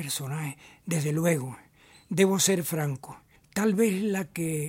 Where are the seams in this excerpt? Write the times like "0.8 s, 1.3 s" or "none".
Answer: 3.4 s